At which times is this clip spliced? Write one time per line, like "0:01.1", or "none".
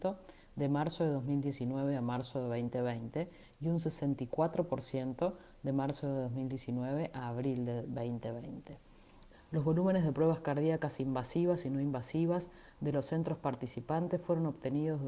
0:09.3